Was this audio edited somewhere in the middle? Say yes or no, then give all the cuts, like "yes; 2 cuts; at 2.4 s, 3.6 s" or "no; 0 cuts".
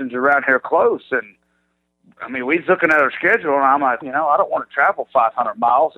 yes; 1 cut; at 4.0 s